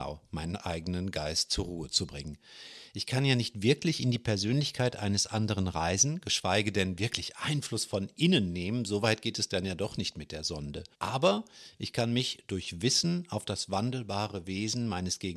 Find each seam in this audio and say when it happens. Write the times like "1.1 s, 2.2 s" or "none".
10.9 s